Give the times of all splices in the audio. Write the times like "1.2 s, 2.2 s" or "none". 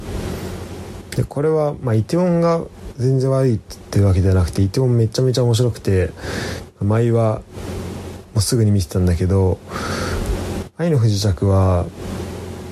none